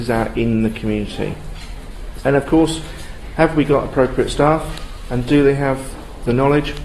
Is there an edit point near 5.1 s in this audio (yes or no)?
no